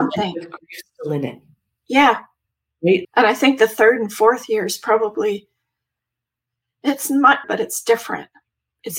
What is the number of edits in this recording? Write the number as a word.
two